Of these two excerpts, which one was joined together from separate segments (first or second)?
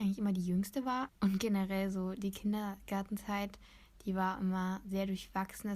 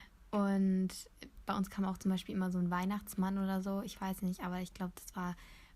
first